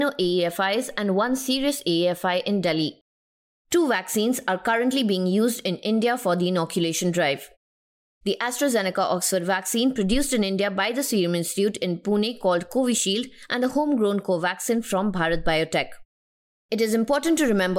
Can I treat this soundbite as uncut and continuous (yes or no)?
yes